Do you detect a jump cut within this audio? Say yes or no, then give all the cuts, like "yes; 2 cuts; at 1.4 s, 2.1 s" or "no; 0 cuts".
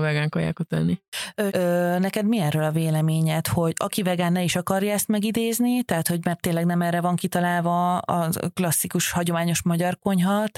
yes; 1 cut; at 1.5 s